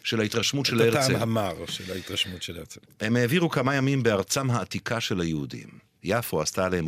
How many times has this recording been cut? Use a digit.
1